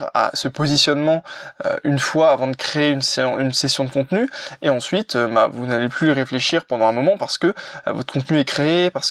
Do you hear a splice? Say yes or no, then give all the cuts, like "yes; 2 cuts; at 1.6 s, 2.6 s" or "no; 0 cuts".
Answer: no; 0 cuts